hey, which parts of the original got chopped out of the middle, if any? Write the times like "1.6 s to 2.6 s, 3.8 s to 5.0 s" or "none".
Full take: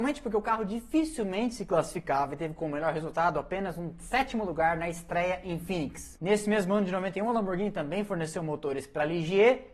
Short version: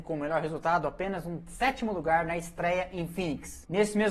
none